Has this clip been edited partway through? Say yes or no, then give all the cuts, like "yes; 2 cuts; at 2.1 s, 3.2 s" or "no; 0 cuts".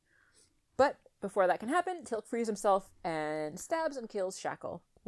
no; 0 cuts